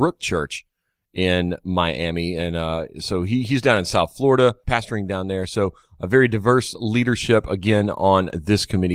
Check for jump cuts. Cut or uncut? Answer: uncut